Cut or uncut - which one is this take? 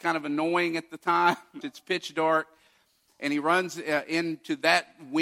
cut